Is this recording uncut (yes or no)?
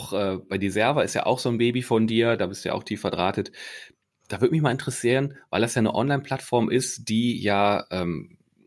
yes